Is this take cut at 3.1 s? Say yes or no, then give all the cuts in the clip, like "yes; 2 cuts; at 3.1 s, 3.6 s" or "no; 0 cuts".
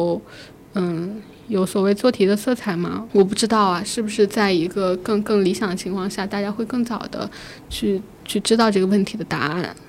yes; 1 cut; at 3.1 s